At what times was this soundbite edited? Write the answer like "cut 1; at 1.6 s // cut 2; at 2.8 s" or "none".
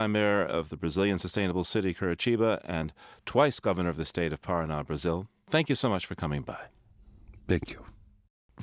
none